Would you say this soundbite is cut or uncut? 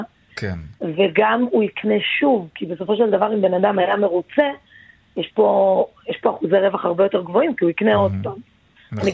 uncut